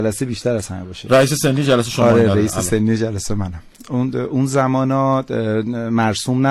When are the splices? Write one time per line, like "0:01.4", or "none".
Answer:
none